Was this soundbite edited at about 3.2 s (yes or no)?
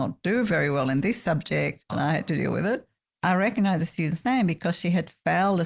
no